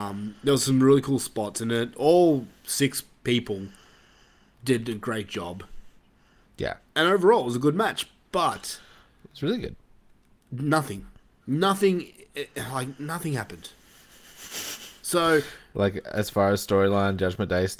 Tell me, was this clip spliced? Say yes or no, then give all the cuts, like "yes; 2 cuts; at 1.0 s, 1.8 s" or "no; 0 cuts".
no; 0 cuts